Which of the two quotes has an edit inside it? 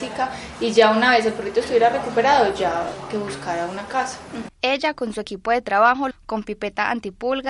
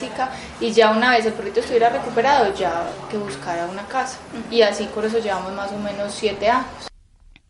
first; 2 cuts; at 4.5 s, 6.1 s

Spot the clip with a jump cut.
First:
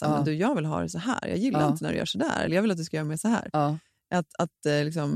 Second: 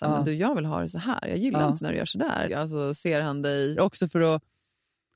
second; 2 cuts; at 2.5 s, 3.8 s

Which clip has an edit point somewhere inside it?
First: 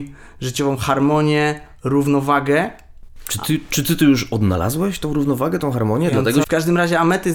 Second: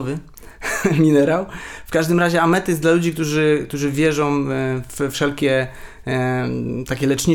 first; 1 cut; at 6.4 s

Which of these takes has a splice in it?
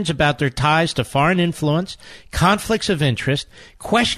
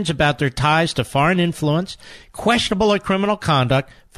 second; 1 cut; at 2.2 s

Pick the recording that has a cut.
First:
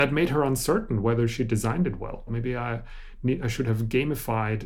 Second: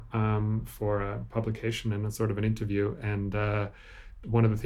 first; 1 cut; at 2.3 s

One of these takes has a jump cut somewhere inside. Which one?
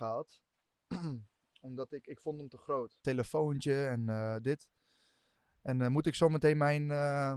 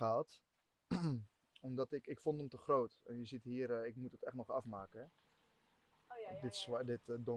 first; 1 cut; at 3.0 s

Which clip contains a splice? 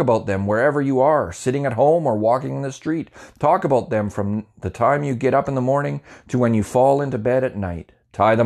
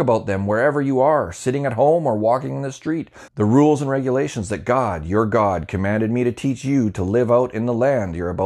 second; 1 cut; at 3.3 s

